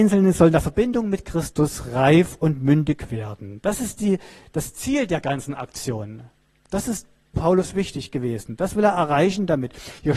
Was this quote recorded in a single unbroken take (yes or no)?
yes